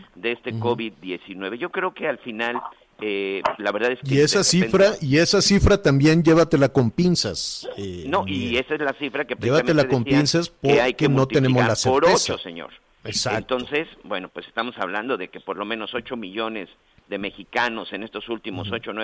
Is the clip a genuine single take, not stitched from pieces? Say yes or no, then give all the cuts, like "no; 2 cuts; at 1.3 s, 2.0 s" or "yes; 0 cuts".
yes; 0 cuts